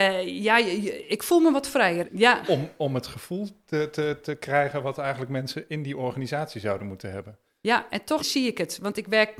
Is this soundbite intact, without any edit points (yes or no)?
no